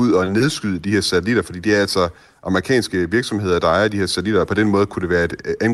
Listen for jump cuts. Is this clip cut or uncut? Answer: uncut